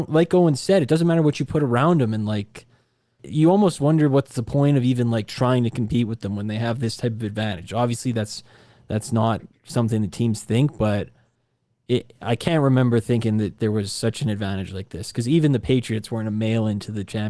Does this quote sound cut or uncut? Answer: uncut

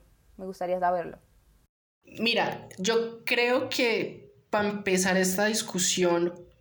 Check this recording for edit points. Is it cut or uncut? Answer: cut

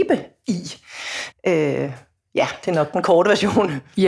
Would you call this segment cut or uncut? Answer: cut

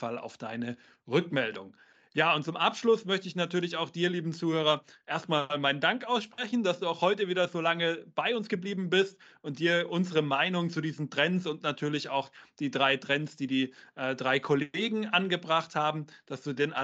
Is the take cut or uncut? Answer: uncut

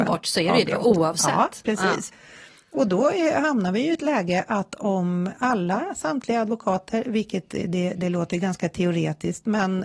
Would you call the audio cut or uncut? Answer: uncut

